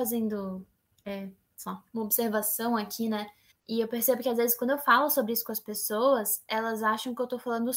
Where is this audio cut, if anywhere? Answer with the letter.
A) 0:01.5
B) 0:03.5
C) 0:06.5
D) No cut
B